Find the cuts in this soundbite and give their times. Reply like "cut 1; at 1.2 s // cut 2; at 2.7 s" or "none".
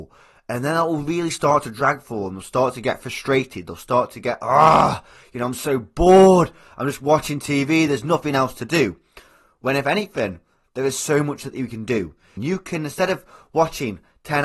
cut 1; at 12.4 s